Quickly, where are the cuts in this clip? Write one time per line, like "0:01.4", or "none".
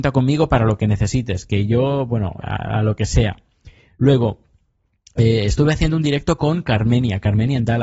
0:02.4